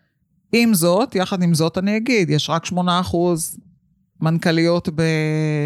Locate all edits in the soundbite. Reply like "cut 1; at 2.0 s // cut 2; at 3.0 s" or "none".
none